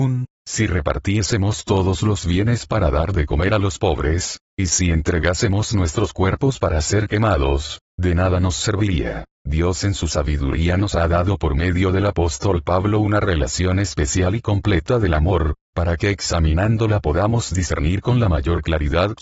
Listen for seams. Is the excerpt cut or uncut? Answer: uncut